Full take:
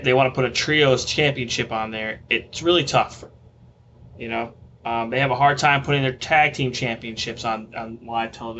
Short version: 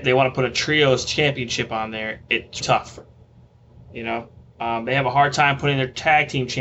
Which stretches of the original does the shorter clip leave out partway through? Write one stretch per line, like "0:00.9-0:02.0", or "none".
0:02.6-0:02.9